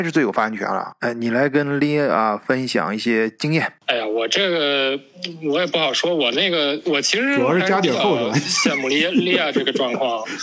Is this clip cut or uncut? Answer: uncut